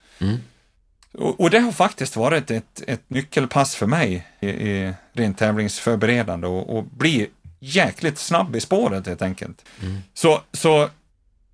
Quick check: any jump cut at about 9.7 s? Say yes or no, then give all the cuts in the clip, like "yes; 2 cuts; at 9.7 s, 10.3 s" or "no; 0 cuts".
yes; 2 cuts; at 4.4 s, 9.7 s